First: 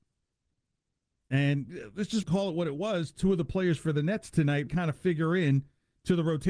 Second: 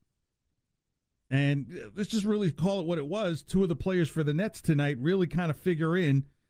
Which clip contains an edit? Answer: first; 2 cuts; at 2.2 s, 4.7 s

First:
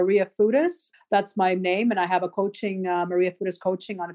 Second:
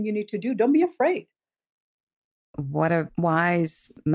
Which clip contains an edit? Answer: first; 1 cut; at 0.9 s

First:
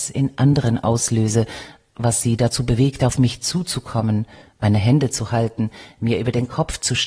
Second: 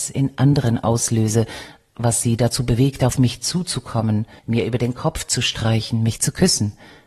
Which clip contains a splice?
second; 1 cut; at 4.4 s

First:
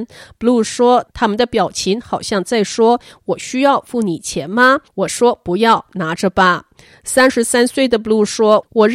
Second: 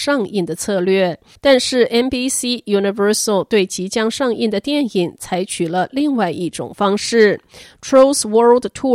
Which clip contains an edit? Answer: second; 1 cut; at 1.4 s

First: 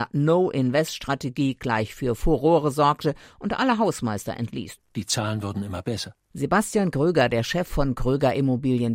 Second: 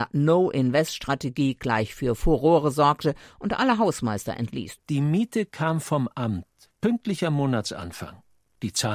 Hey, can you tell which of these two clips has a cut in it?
first; 1 cut; at 4.8 s

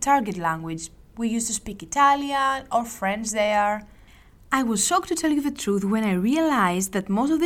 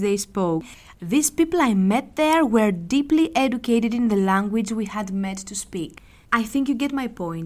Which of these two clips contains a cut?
second; 2 cuts; at 0.9 s, 6.2 s

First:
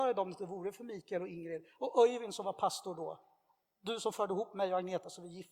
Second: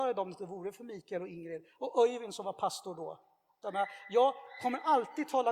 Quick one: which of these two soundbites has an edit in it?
second; 1 cut; at 3.6 s

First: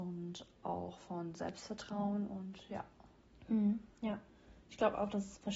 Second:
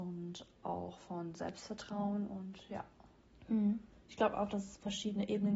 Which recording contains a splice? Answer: second; 1 cut; at 3.9 s

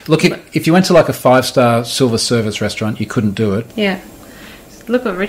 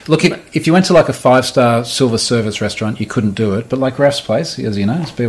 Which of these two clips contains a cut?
first; 1 cut; at 3.7 s

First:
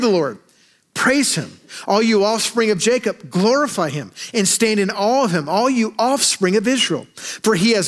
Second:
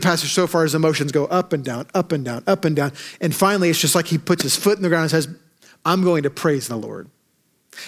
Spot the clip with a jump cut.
second; 2 cuts; at 2.4 s, 5.8 s

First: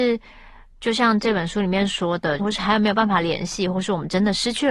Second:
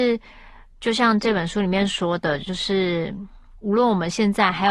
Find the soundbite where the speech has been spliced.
first; 1 cut; at 2.4 s

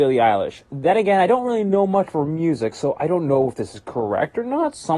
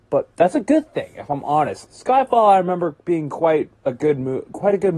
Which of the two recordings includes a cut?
second; 1 cut; at 1.8 s

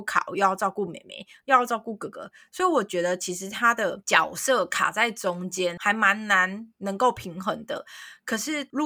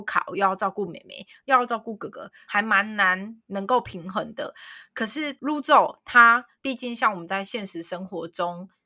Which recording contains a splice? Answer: second; 2 cuts; at 2.5 s, 6.6 s

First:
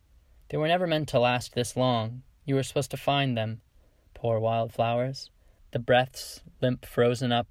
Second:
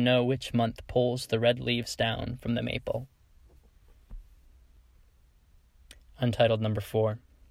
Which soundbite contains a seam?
first; 1 cut; at 5.6 s

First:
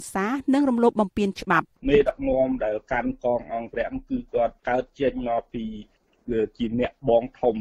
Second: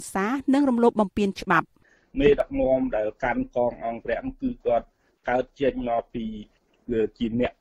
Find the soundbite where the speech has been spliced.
first; 2 cuts; at 1.8 s, 4.6 s

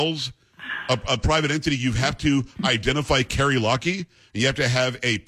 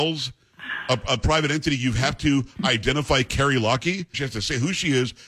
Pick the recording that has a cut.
second; 1 cut; at 4.1 s

